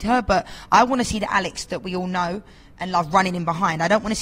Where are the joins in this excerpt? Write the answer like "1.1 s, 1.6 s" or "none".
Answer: none